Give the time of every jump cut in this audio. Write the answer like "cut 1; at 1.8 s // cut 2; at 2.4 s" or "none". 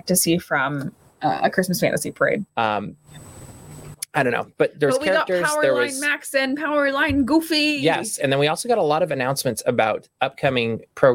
cut 1; at 2.5 s